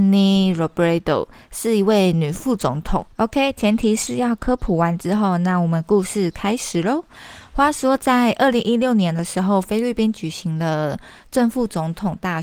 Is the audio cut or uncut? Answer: cut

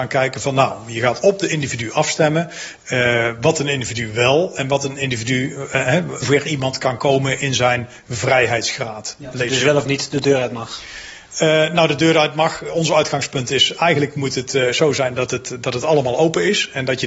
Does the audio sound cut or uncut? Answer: cut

